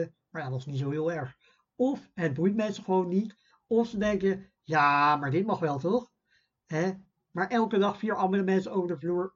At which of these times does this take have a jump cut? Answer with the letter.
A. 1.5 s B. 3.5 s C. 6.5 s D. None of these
D